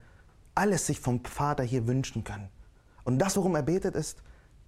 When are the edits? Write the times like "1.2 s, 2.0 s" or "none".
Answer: none